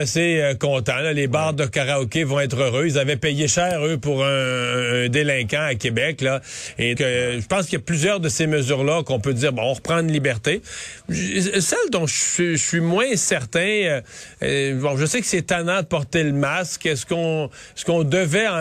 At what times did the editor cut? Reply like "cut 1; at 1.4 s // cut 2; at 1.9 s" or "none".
cut 1; at 7.0 s